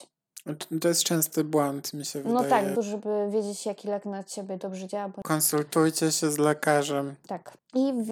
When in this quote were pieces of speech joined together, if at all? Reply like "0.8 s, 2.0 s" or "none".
2.7 s